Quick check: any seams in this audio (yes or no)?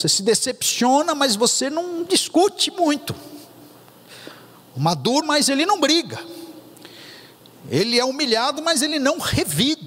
yes